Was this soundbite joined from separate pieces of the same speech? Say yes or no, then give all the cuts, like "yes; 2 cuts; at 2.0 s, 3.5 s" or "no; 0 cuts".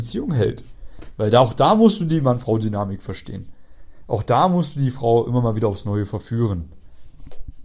no; 0 cuts